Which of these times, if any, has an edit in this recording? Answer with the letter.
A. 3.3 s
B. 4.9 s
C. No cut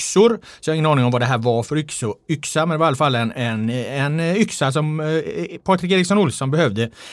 A